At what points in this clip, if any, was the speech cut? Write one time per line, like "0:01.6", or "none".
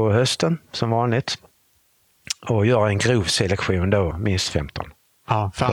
0:04.1